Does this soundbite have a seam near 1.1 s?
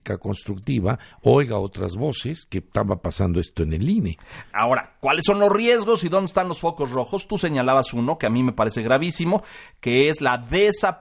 no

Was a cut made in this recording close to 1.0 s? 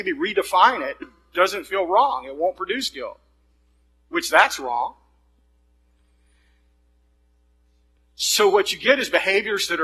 yes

